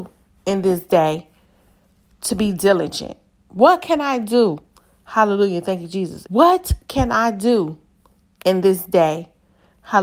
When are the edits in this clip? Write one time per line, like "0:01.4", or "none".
0:06.3